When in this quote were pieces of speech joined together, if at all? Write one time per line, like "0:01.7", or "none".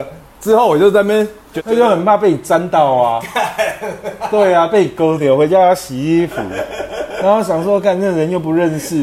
none